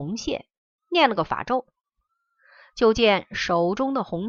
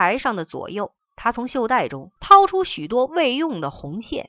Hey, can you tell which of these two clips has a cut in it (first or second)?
second